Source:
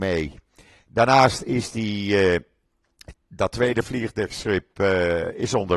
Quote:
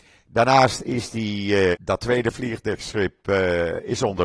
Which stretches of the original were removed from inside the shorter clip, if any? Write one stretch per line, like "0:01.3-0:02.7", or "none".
0:02.3-0:03.2